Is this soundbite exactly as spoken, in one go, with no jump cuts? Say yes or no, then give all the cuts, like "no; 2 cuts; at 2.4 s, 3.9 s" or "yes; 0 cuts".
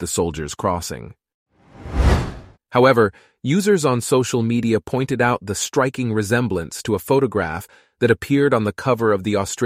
no; 1 cut; at 2.5 s